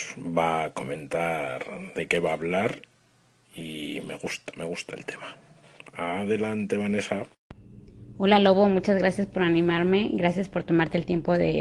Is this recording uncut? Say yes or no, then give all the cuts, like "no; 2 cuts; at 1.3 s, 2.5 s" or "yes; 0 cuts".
yes; 0 cuts